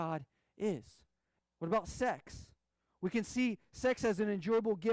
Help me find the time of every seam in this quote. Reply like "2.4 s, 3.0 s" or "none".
1.4 s